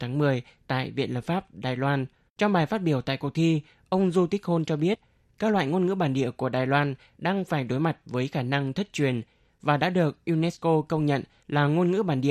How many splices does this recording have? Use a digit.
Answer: 1